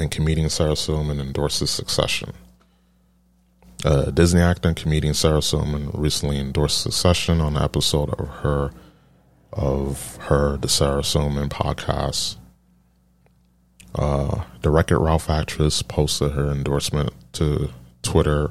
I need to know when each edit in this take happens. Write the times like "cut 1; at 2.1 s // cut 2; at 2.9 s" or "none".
none